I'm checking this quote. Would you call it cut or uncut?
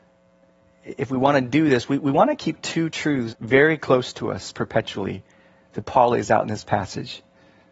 cut